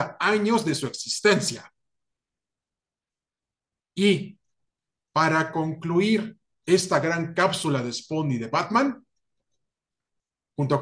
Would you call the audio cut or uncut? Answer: uncut